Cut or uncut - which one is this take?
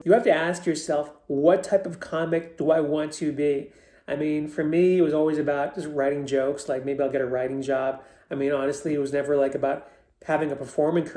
uncut